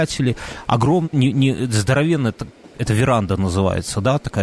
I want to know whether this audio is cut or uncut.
cut